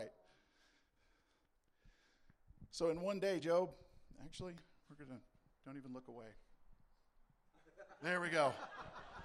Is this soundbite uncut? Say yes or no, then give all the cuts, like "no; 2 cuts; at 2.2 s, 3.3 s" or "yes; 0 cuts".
yes; 0 cuts